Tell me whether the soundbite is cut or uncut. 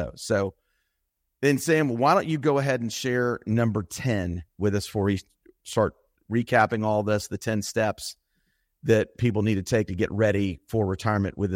uncut